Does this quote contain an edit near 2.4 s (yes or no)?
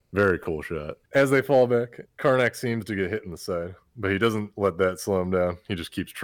no